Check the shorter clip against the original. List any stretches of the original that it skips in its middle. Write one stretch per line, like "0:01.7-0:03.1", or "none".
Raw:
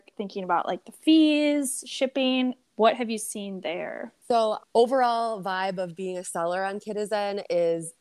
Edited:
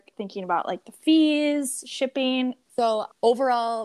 0:02.7-0:04.2